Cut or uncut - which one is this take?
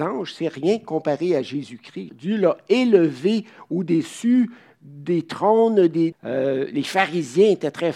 cut